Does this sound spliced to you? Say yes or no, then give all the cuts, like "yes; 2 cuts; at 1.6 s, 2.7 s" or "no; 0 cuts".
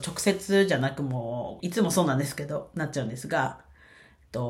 yes; 1 cut; at 1.6 s